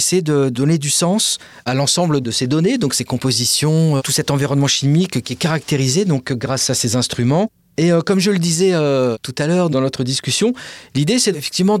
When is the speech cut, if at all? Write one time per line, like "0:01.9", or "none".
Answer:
0:04.0